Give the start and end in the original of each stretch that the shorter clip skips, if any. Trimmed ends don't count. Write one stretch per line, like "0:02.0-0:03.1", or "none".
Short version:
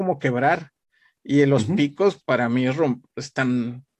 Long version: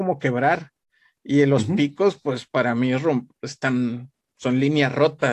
0:02.2-0:02.5